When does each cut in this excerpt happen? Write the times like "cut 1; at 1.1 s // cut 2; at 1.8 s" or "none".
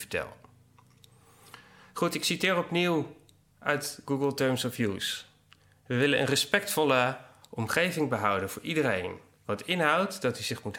none